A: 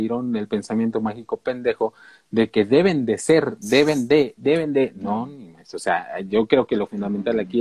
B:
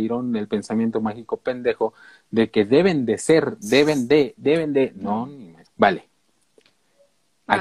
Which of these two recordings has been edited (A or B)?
B